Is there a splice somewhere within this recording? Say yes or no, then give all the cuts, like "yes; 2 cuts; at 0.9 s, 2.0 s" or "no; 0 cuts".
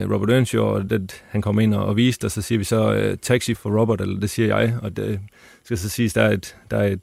yes; 1 cut; at 3.5 s